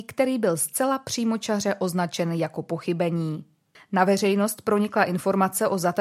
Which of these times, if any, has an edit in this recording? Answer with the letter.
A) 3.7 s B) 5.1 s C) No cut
A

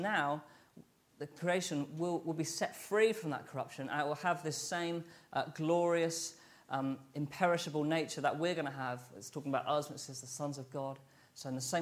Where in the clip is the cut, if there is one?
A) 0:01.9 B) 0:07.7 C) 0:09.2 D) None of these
D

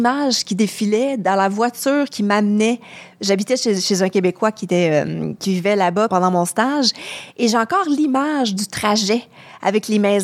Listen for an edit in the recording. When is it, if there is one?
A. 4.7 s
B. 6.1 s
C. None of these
B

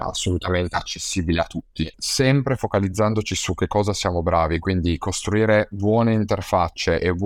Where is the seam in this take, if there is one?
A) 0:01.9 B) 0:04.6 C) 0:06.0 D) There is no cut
A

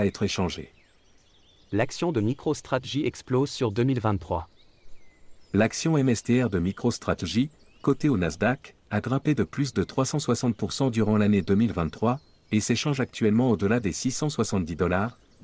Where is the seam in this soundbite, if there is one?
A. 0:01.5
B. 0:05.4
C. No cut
C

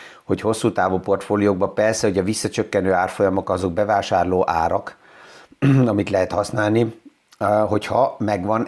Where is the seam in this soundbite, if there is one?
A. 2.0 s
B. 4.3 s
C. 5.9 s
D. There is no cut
D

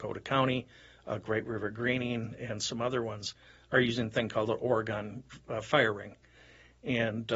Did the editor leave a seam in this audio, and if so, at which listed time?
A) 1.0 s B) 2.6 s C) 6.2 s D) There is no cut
D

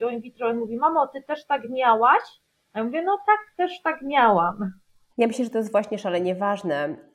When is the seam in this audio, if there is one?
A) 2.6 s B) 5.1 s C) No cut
B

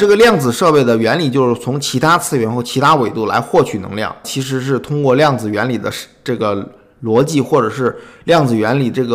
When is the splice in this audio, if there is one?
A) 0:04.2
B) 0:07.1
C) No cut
A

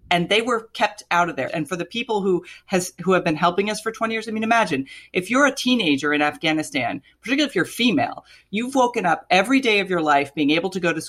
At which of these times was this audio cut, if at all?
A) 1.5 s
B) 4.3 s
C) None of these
A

